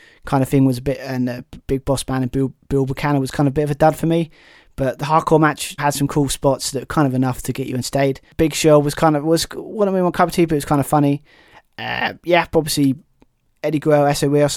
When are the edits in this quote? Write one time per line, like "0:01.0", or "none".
0:01.6
0:05.8